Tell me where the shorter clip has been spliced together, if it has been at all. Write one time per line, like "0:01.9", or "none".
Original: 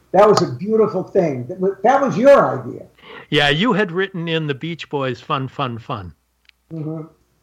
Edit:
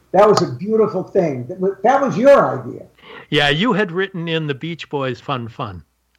0:05.2